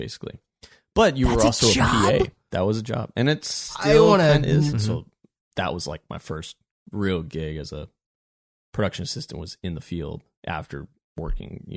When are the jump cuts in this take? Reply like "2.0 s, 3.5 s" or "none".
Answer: 4.7 s